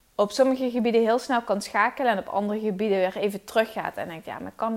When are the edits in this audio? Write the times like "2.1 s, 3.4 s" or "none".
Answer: none